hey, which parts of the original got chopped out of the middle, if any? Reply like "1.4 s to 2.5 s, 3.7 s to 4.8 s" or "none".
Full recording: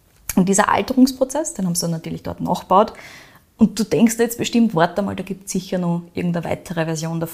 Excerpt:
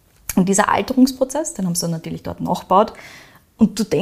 none